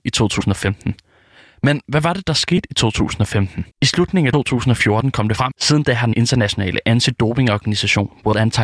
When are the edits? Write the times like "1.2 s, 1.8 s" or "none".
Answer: 3.7 s, 5.5 s

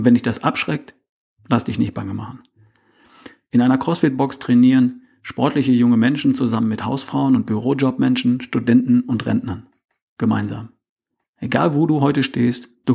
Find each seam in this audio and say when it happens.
none

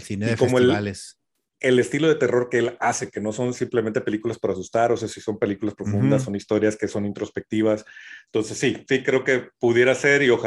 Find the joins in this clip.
none

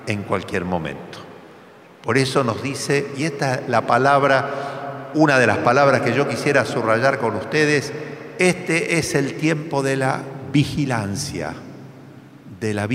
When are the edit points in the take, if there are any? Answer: none

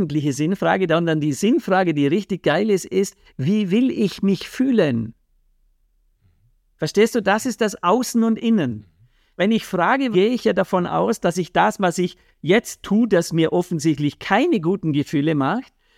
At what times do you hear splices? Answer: 10.1 s

